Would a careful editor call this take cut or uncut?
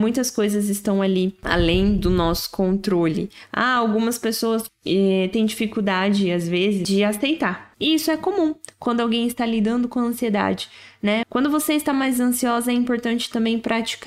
cut